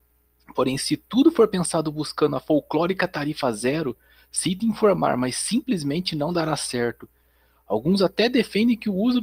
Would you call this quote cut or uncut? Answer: uncut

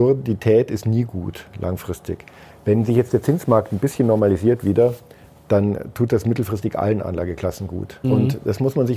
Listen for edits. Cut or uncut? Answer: cut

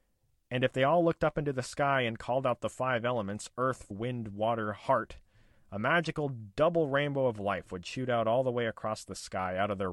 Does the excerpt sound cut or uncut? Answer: cut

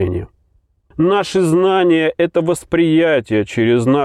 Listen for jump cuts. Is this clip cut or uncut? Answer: cut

